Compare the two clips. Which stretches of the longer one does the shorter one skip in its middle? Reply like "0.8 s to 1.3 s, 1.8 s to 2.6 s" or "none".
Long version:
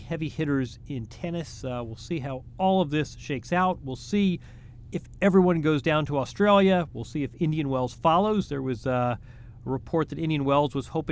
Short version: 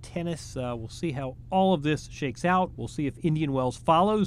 3.8 s to 6.9 s